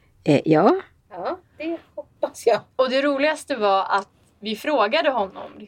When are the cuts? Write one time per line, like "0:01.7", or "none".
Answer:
0:01.1